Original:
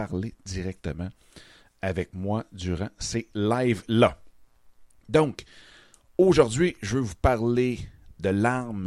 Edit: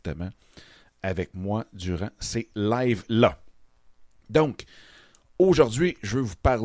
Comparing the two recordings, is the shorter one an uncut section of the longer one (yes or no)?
yes